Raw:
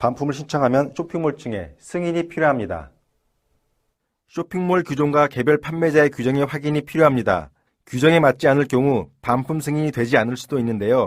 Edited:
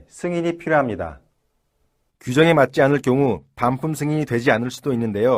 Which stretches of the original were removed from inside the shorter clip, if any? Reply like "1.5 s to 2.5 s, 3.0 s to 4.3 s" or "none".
3.8 s to 7.7 s